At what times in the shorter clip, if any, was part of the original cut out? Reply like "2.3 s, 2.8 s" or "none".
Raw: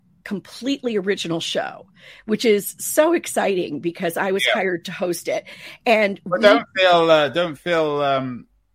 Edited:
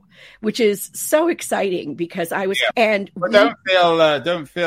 2.7 s